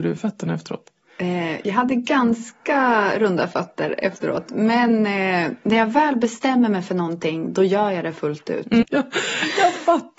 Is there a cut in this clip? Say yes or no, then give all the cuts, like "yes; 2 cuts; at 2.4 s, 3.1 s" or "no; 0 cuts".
yes; 1 cut; at 8.8 s